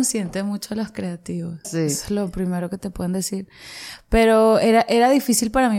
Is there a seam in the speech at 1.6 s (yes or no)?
yes